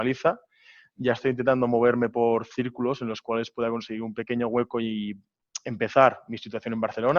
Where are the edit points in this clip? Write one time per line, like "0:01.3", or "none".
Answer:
none